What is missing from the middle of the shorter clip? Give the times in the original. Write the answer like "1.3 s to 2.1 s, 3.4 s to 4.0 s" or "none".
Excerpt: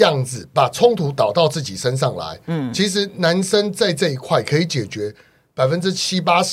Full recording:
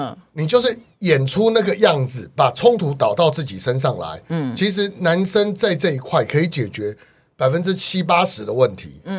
none